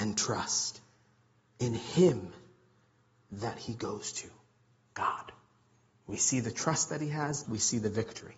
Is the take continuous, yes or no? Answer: no